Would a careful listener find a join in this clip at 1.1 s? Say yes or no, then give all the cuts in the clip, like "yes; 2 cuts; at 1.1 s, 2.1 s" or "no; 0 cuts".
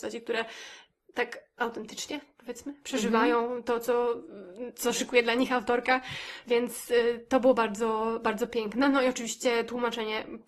no; 0 cuts